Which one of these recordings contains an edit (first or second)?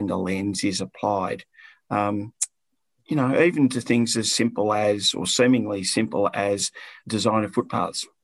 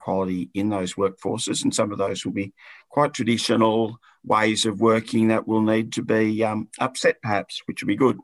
first